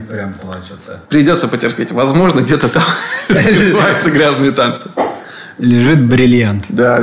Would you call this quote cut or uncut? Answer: uncut